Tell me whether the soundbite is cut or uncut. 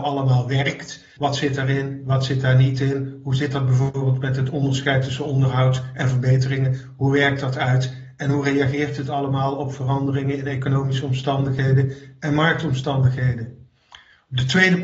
cut